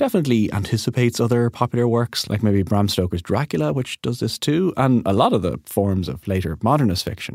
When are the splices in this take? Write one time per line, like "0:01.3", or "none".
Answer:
none